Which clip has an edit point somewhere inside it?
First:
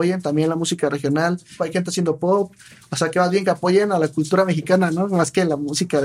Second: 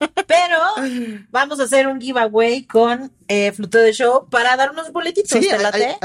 first; 1 cut; at 1.6 s

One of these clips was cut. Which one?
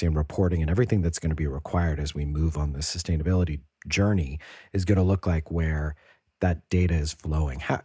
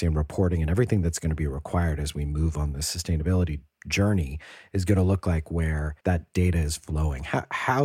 second; 1 cut; at 6.0 s

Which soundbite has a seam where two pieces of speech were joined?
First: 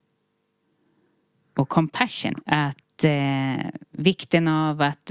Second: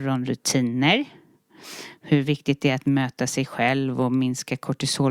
first; 1 cut; at 2.4 s

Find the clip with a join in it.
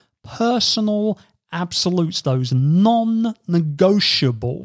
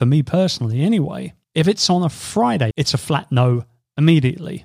second; 2 cuts; at 1.4 s, 2.7 s

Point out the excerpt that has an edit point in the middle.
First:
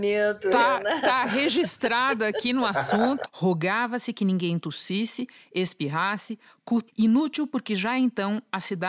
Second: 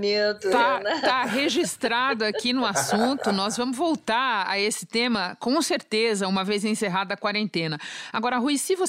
first; 2 cuts; at 3.2 s, 6.9 s

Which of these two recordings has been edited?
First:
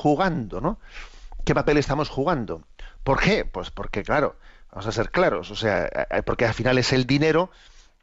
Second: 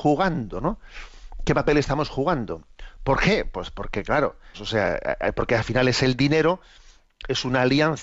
second; 1 cut; at 4.5 s

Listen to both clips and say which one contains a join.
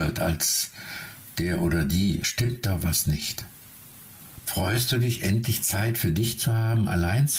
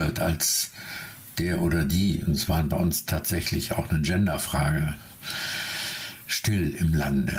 first; 2 cuts; at 2.2 s, 4.4 s

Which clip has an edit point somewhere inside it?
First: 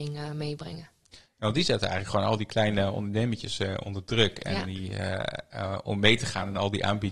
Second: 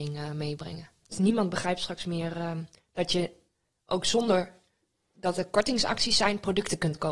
second; 1 cut; at 1.1 s

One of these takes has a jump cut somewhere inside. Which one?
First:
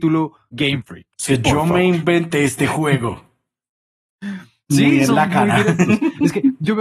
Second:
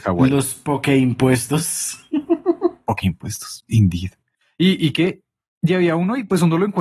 first; 1 cut; at 1.1 s

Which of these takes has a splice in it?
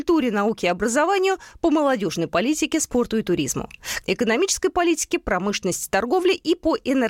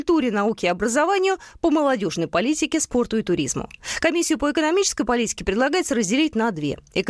first; 1 cut; at 4.0 s

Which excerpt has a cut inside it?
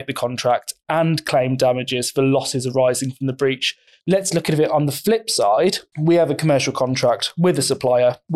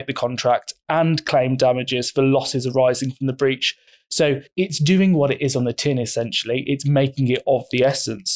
first; 2 cuts; at 4.0 s, 5.9 s

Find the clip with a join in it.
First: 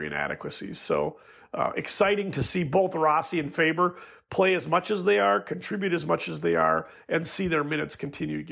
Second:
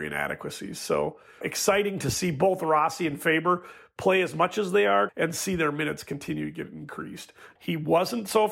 second; 3 cuts; at 1.4 s, 5.1 s, 7.6 s

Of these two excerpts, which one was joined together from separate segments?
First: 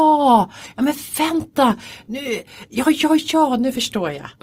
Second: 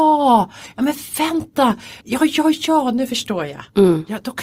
second; 1 cut; at 2.0 s

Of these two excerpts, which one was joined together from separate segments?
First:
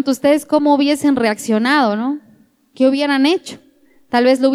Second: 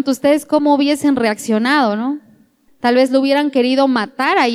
second; 1 cut; at 2.7 s

